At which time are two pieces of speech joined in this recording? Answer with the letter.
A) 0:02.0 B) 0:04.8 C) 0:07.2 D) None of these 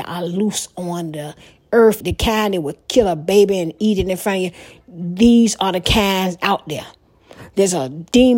A